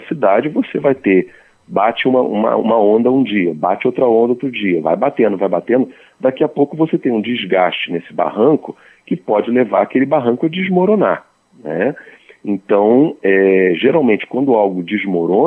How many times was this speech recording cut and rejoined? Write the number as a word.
zero